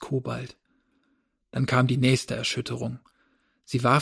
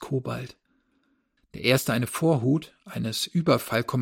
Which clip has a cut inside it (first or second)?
second